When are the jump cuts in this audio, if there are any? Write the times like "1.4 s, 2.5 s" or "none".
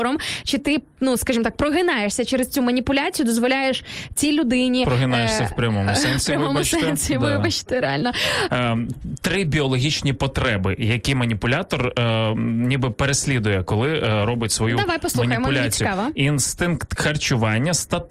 8.5 s